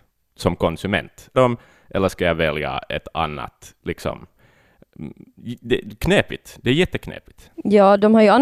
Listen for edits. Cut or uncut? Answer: cut